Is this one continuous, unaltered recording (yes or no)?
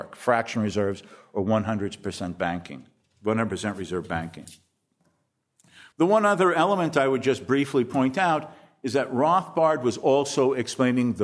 no